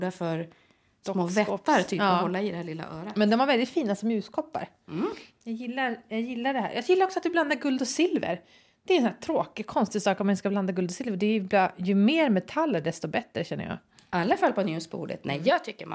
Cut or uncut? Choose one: uncut